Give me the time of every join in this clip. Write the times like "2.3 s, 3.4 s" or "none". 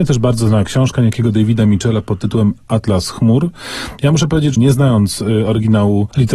4.6 s

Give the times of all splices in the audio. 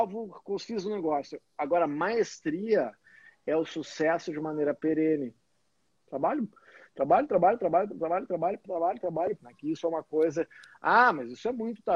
5.9 s, 9.4 s

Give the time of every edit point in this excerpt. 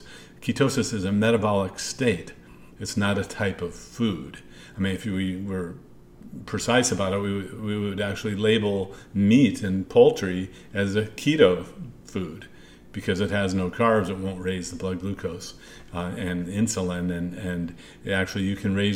none

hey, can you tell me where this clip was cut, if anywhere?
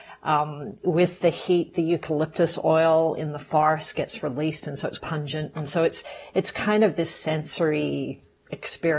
5.0 s

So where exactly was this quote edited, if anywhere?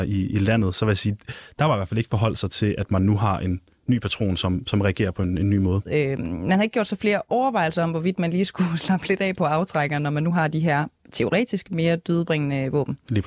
5.9 s

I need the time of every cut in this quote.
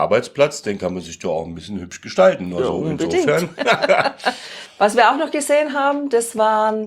none

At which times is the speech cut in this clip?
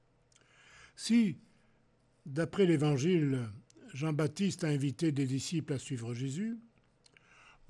none

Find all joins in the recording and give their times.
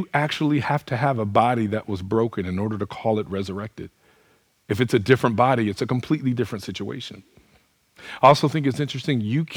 none

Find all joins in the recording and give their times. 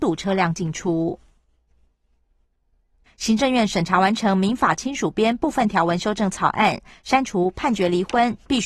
3.1 s

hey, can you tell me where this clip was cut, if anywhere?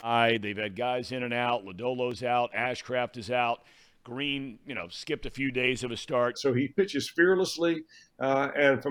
6.3 s

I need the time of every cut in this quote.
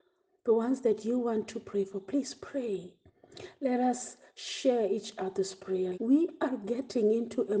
5.9 s

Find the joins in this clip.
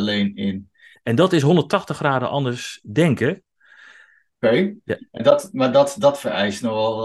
0.9 s, 4.3 s

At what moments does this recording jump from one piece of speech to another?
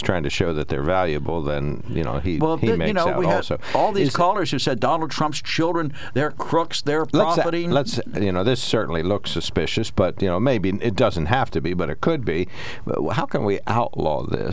none

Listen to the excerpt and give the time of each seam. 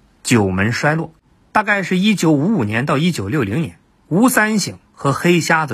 none

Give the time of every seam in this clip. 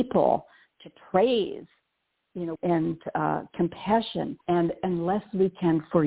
2.6 s, 4.4 s

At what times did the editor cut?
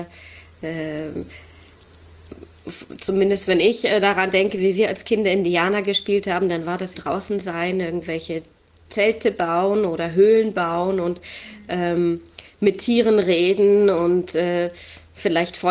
6.9 s

